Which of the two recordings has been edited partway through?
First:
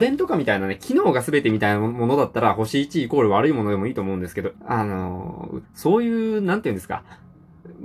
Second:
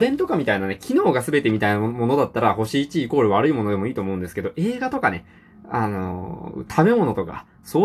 first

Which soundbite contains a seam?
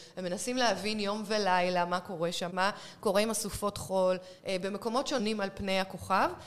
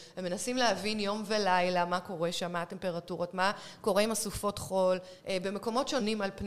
first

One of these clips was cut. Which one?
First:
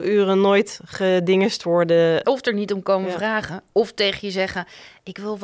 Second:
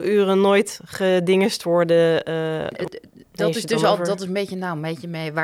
first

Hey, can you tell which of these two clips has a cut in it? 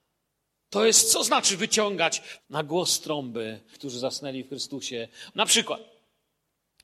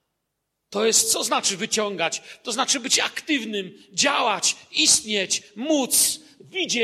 first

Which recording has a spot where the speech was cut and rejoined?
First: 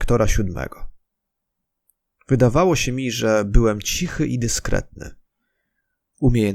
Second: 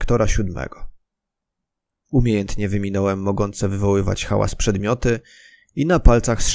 second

